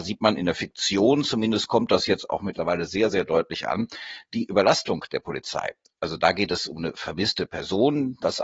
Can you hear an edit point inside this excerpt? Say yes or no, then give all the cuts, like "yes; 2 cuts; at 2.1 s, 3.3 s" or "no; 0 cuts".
no; 0 cuts